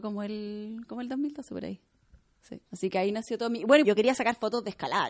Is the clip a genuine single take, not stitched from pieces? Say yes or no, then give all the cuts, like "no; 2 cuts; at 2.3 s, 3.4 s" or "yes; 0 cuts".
no; 2 cuts; at 2.7 s, 3.8 s